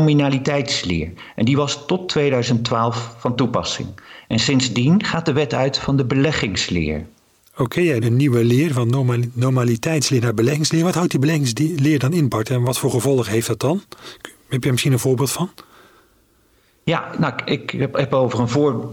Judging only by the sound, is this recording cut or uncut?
cut